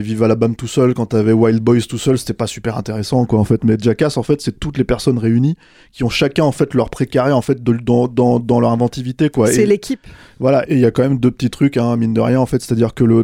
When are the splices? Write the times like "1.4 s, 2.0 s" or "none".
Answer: 10.6 s